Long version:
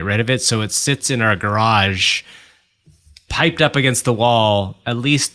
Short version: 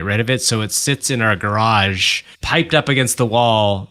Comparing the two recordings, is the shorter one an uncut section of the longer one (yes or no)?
no